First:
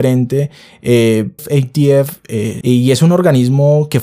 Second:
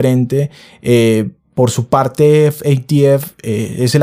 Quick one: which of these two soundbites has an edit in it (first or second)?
first